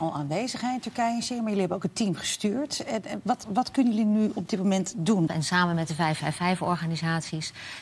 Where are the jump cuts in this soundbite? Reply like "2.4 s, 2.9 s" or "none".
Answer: 3.4 s, 5.3 s